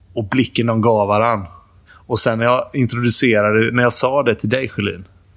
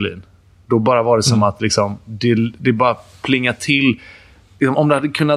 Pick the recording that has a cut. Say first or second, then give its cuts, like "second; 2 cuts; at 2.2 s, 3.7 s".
first; 1 cut; at 1.9 s